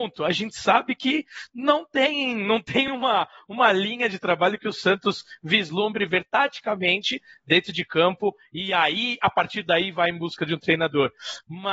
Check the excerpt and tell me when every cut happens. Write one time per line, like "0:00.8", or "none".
none